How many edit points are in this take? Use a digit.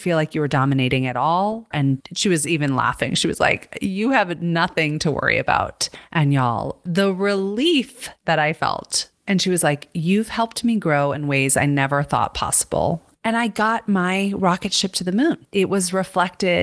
2